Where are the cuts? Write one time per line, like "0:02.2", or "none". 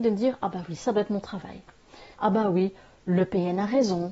0:02.1